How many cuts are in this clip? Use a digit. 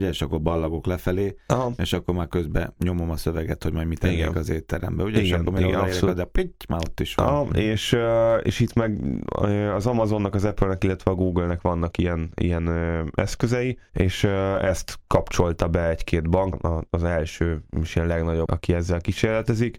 2